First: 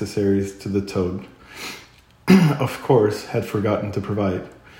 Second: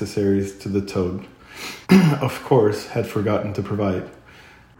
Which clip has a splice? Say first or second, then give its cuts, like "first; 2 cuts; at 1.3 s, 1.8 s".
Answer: second; 1 cut; at 1.8 s